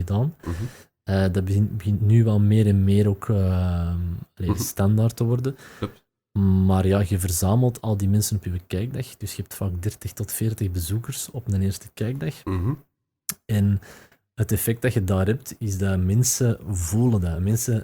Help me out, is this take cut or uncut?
uncut